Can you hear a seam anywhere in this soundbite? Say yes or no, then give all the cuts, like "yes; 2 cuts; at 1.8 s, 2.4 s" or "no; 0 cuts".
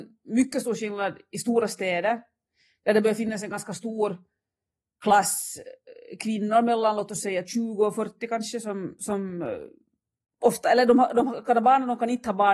no; 0 cuts